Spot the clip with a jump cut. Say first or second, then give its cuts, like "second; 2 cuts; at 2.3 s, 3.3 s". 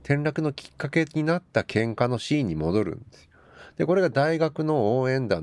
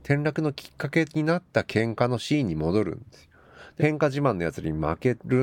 second; 1 cut; at 3.8 s